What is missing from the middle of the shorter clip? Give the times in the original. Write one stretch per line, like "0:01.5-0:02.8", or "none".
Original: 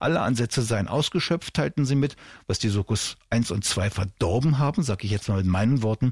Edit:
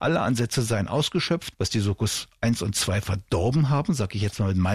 0:01.5-0:02.4